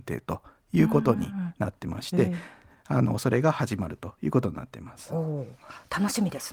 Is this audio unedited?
yes; 0 cuts

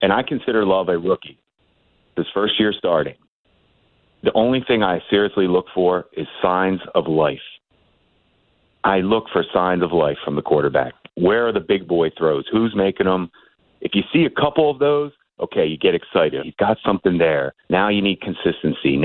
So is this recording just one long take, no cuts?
no; 2 cuts; at 16.4 s, 17.6 s

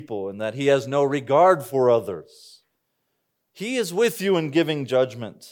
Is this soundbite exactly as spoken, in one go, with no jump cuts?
no; 1 cut; at 3.5 s

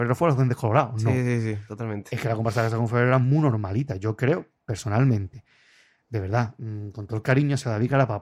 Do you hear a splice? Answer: no; 0 cuts

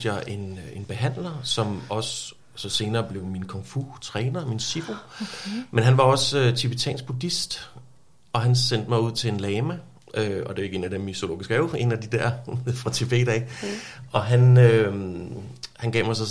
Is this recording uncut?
yes; 0 cuts

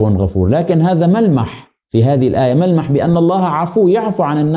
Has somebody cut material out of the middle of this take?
yes; 1 cut; at 1.8 s

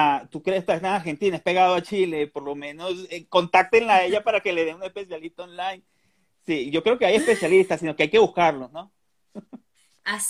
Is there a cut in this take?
no; 0 cuts

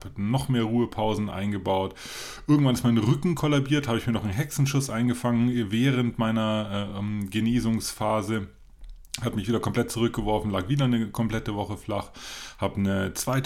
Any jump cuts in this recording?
no; 0 cuts

